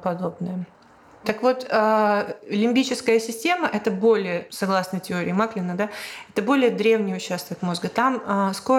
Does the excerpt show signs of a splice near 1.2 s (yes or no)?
no